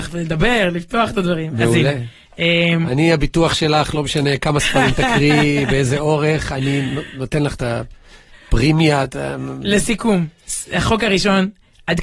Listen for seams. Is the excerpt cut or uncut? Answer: uncut